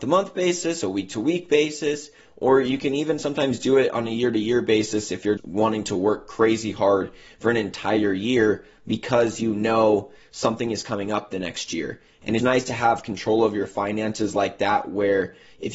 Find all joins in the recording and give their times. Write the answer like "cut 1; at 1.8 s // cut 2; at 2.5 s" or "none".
cut 1; at 5.4 s // cut 2; at 12.4 s